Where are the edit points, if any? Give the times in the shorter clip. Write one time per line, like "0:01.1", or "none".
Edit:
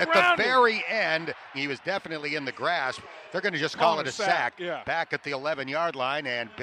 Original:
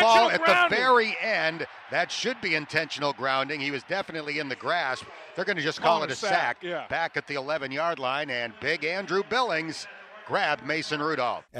0:01.5